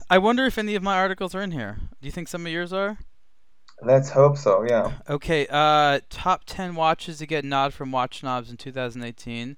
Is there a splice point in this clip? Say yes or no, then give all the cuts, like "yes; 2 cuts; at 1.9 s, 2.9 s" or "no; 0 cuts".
no; 0 cuts